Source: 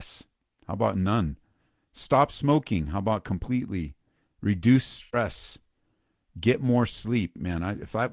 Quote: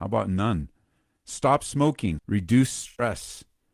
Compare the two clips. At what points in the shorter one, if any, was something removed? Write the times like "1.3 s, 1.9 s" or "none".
2.2 s